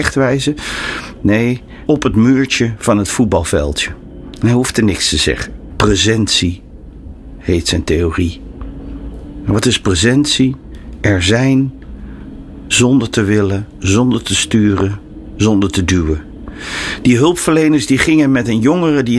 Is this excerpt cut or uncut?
cut